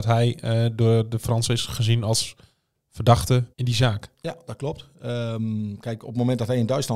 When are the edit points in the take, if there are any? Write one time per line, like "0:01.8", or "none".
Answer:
0:03.5